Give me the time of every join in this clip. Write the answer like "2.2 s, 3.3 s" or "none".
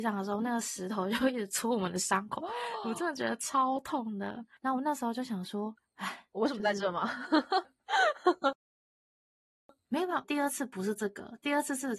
7.6 s, 10.2 s